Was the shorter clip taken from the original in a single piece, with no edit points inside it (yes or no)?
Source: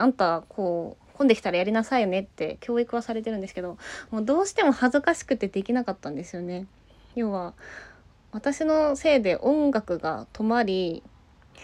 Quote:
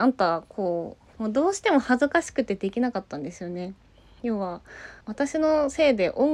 no